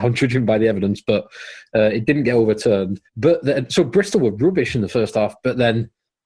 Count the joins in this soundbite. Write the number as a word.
one